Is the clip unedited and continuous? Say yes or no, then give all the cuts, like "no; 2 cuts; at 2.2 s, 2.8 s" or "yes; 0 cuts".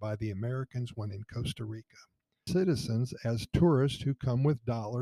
no; 1 cut; at 2.5 s